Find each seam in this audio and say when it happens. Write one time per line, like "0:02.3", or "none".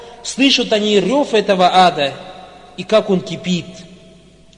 none